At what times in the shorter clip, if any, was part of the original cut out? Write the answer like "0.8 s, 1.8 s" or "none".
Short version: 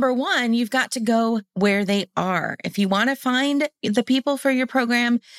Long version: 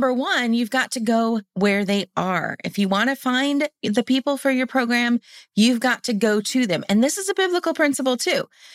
none

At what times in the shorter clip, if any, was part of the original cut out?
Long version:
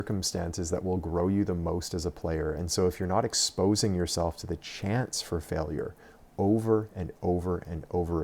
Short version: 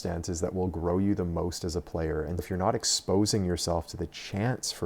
2.4 s

